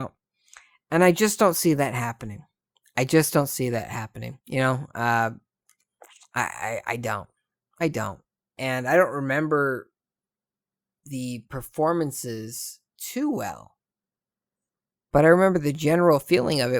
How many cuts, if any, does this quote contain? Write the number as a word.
two